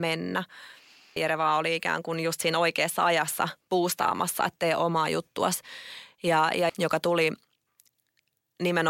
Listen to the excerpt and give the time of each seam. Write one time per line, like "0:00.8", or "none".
0:01.2
0:06.7